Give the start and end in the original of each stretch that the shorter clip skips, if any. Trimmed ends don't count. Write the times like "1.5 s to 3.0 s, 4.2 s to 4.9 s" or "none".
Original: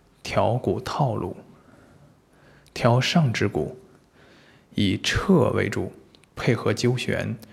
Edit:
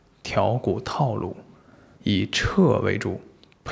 2.0 s to 4.7 s